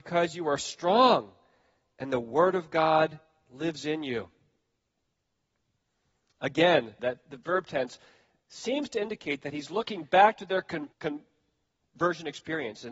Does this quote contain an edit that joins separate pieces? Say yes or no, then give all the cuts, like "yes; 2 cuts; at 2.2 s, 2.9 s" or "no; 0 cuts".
yes; 2 cuts; at 7.0 s, 10.9 s